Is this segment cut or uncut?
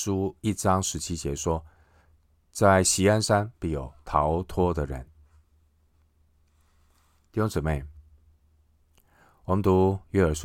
uncut